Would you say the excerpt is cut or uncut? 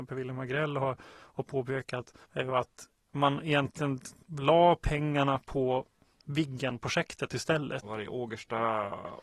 cut